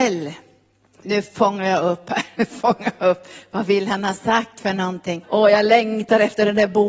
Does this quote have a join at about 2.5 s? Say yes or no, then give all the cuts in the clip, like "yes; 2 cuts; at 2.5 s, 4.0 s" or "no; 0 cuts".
no; 2 cuts; at 1.0 s, 5.2 s